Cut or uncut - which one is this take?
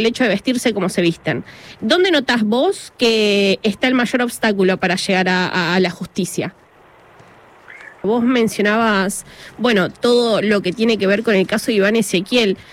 cut